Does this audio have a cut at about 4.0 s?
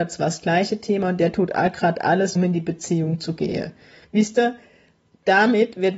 yes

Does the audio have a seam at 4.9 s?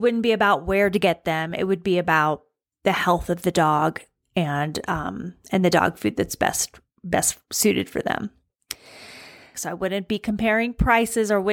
no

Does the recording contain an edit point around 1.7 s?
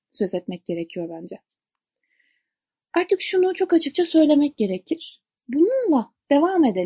no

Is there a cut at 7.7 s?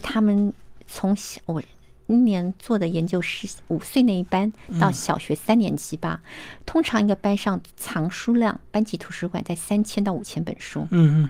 yes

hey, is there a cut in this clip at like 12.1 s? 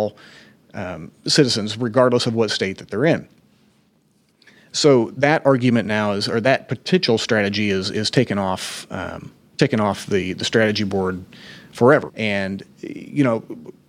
yes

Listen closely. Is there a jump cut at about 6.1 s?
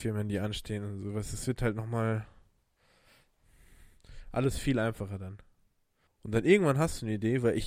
yes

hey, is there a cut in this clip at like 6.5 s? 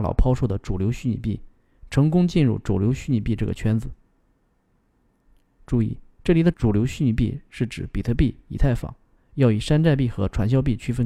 yes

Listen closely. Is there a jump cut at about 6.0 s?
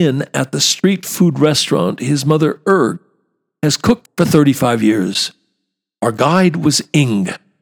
yes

